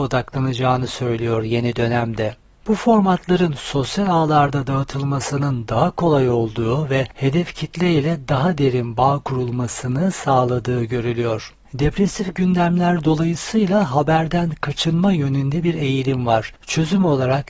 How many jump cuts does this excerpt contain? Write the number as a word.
one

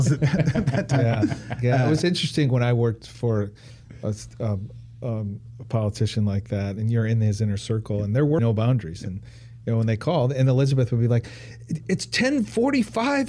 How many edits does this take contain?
one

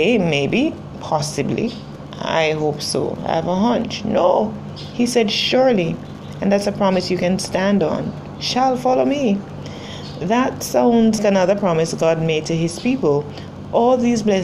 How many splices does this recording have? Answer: one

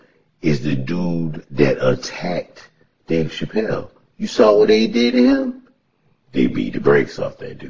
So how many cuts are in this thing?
one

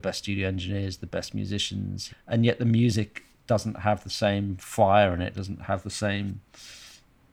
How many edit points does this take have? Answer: two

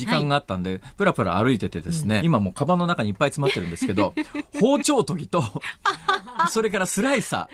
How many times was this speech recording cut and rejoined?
one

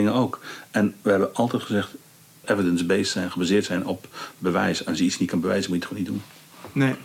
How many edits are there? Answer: one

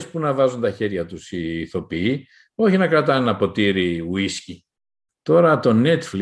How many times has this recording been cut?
one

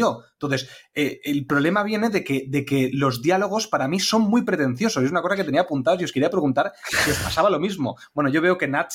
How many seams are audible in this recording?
zero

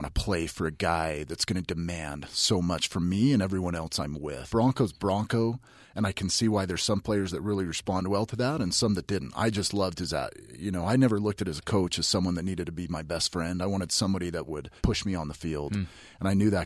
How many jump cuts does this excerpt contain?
two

